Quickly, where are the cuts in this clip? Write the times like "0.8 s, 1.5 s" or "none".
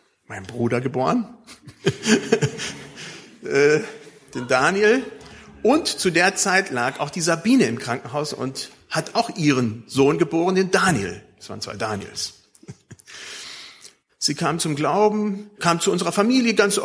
14.1 s, 15.6 s